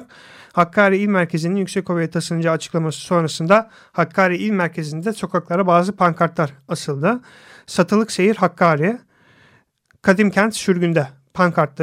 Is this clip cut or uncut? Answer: uncut